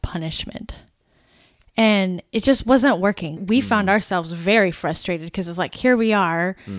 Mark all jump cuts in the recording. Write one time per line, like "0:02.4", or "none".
none